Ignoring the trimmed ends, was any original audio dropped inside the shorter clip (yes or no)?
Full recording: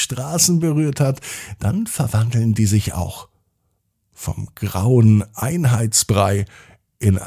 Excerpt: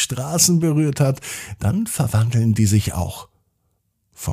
no